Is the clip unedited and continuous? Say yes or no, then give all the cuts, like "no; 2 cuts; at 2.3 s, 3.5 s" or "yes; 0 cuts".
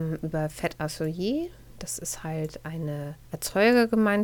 no; 1 cut; at 3.2 s